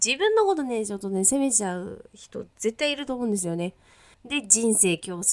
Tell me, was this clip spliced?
yes; 1 cut; at 4.1 s

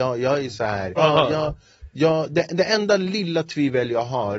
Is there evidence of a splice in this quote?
yes; 1 cut; at 1.0 s

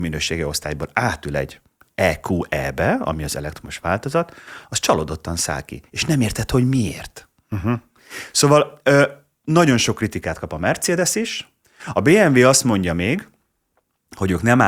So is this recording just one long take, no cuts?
yes; 0 cuts

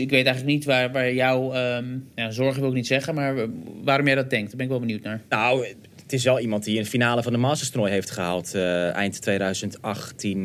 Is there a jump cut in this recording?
yes; 1 cut; at 2.1 s

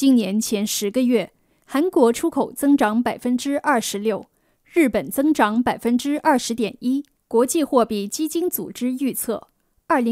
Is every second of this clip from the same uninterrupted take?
no; 1 cut; at 7.1 s

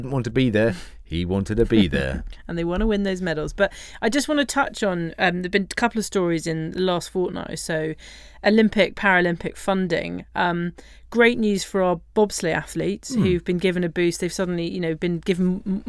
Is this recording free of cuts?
yes; 0 cuts

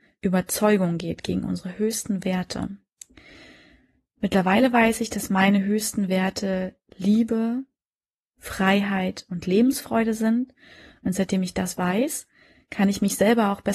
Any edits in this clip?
no; 0 cuts

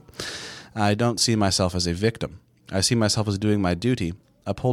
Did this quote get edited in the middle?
no; 0 cuts

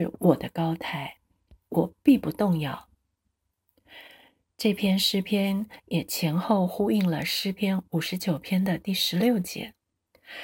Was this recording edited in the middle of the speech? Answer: no; 0 cuts

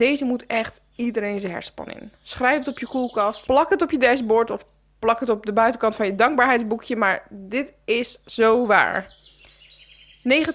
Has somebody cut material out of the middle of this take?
yes; 1 cut; at 3.5 s

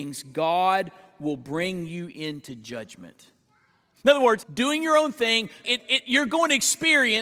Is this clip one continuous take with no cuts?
no; 2 cuts; at 4.4 s, 5.6 s

